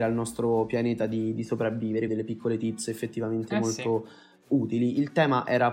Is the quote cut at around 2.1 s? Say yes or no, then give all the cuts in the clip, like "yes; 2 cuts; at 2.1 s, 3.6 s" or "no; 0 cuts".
yes; 1 cut; at 2.1 s